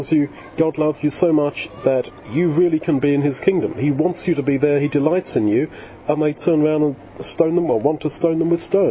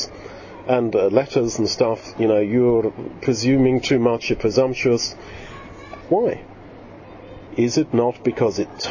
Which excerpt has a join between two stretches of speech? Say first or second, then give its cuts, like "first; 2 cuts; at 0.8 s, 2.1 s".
second; 2 cuts; at 6.0 s, 7.5 s